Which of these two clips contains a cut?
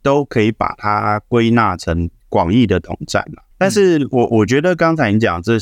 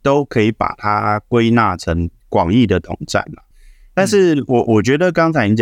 first; 1 cut; at 3.5 s

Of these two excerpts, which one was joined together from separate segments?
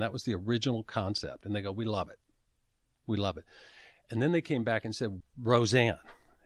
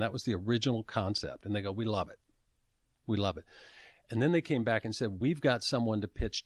first; 1 cut; at 5.2 s

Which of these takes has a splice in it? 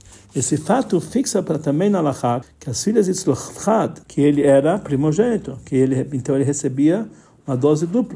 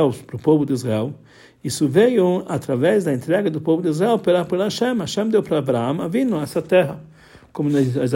first; 2 cuts; at 2.4 s, 4.0 s

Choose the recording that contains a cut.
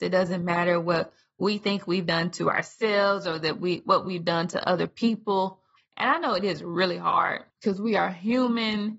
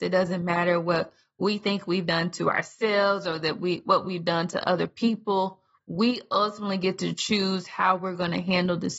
first; 2 cuts; at 5.8 s, 7.5 s

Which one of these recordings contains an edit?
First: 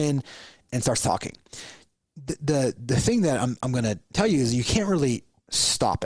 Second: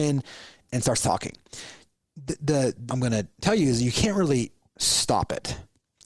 second; 1 cut; at 2.9 s

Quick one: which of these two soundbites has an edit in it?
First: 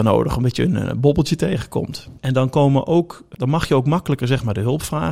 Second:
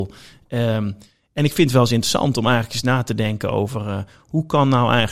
first; 1 cut; at 2.2 s

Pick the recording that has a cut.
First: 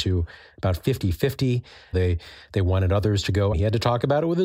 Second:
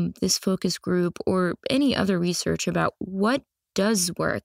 first; 2 cuts; at 1.9 s, 3.5 s

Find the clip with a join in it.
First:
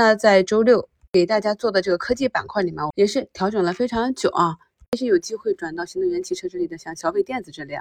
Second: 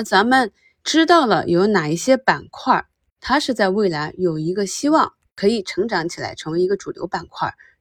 first; 1 cut; at 2.9 s

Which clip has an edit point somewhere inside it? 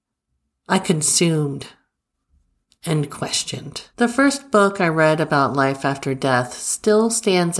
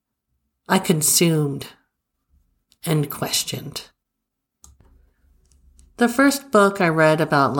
first; 1 cut; at 3.9 s

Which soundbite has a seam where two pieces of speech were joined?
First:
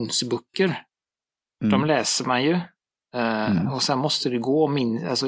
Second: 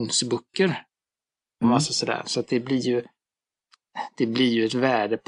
second; 1 cut; at 1.6 s

